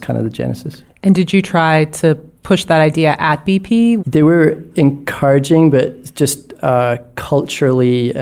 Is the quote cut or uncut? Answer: cut